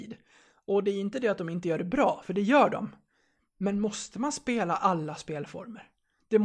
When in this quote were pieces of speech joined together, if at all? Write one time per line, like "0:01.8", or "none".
none

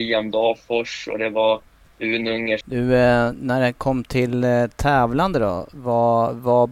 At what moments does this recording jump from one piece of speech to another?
0:02.6

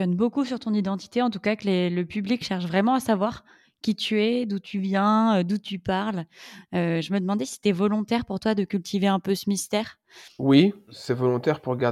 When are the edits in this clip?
none

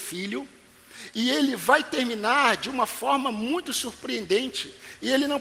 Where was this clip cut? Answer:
none

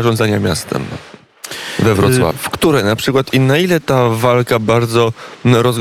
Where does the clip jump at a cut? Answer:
0:02.3

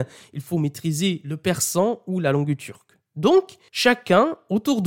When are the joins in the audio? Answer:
none

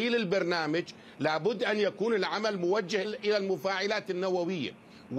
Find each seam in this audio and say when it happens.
0:03.0

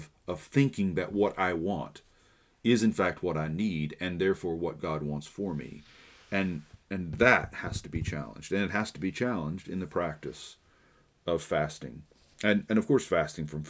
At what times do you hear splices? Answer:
none

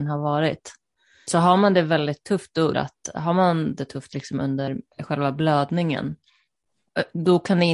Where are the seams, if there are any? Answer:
0:02.7
0:04.9

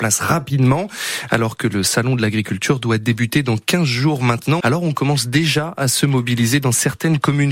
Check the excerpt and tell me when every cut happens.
0:04.6

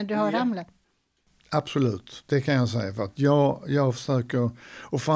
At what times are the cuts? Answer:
none

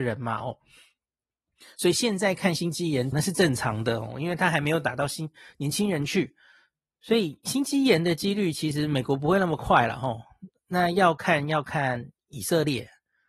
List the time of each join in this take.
0:03.1

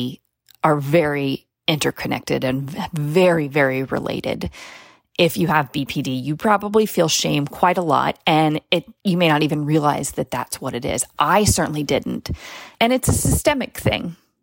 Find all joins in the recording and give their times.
0:09.0
0:12.7

